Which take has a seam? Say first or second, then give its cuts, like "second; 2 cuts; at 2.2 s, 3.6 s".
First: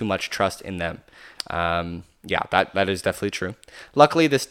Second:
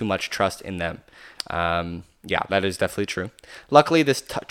second; 1 cut; at 2.5 s